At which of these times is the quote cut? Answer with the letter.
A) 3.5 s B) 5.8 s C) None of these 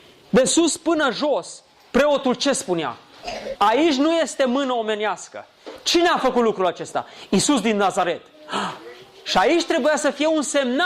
A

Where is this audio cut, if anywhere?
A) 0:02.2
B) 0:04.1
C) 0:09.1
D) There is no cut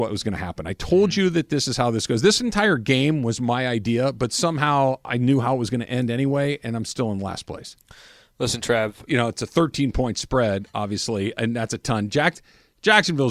C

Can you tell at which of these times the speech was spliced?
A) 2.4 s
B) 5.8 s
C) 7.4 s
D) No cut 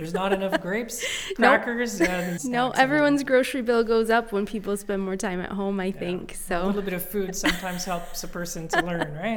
A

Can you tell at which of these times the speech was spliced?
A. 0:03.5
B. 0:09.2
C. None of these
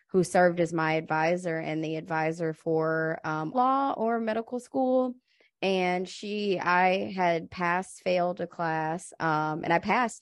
A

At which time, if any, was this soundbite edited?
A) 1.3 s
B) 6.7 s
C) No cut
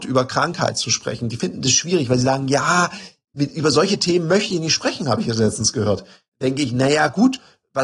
C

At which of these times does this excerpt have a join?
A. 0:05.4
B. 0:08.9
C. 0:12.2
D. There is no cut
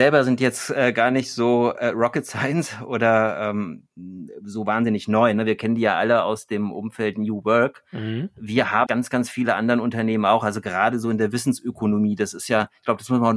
B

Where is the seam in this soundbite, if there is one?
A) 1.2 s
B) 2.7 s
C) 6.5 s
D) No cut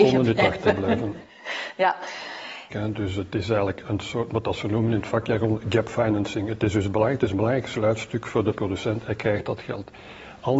B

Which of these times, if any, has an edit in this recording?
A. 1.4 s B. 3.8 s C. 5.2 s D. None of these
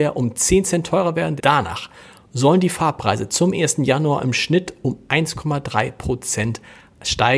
A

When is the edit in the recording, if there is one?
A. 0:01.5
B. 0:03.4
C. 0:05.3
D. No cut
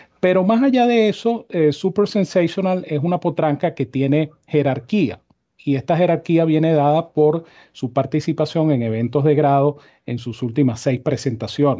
D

